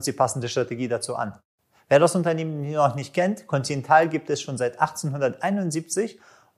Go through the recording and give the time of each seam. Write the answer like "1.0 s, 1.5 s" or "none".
none